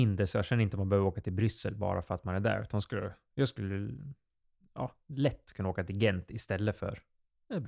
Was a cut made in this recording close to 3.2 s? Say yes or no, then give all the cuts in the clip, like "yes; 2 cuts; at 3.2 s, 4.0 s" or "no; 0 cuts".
no; 0 cuts